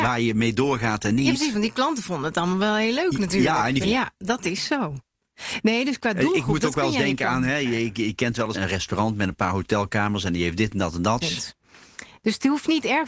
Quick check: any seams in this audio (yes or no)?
yes